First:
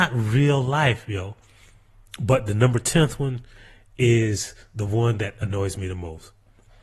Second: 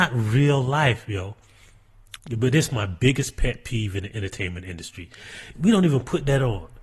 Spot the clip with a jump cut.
second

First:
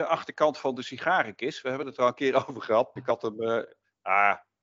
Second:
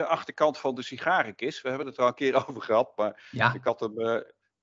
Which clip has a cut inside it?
first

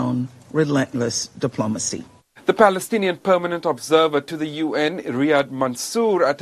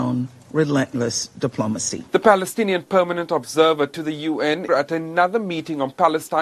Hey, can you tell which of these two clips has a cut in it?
second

